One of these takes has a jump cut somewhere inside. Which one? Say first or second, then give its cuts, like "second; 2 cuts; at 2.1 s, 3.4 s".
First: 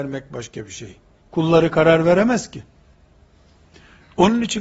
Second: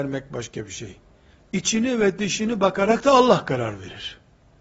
first; 1 cut; at 1.2 s